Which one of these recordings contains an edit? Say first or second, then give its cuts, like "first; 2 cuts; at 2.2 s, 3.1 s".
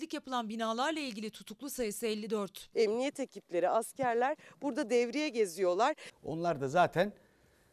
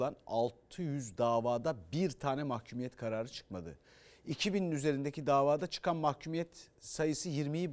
first; 2 cuts; at 2.7 s, 6.1 s